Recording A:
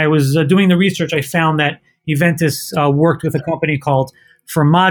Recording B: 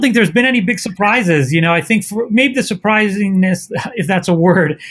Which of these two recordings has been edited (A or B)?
B